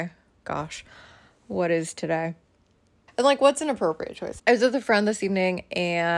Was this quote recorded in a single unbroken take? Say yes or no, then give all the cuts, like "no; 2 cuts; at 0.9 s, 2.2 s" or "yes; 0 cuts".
no; 2 cuts; at 3.1 s, 4.4 s